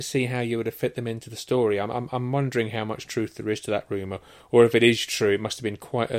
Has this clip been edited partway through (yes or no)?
no